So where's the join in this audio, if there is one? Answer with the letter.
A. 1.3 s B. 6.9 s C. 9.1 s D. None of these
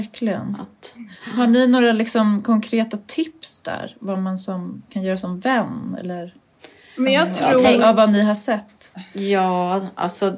D